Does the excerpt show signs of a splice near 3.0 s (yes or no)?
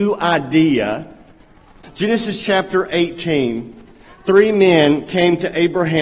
no